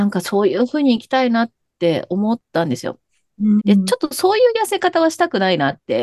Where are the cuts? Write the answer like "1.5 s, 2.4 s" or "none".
3.6 s